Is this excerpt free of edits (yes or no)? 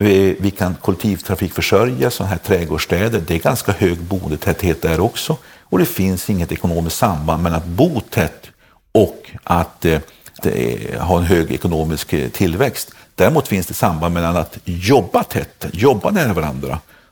no